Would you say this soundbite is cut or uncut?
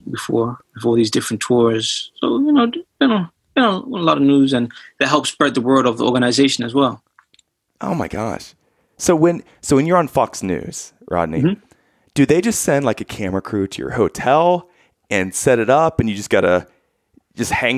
uncut